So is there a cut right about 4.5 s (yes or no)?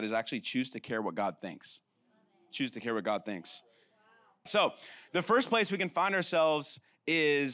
yes